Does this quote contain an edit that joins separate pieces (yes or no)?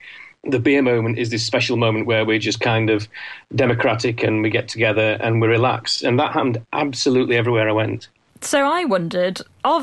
no